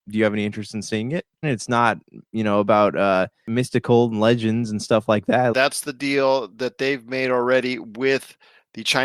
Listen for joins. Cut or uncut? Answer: cut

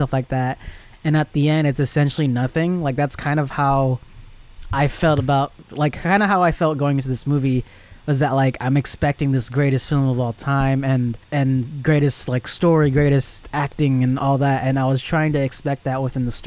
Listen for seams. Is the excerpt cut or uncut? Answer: cut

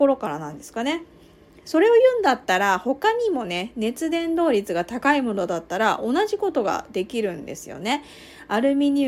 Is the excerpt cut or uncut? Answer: uncut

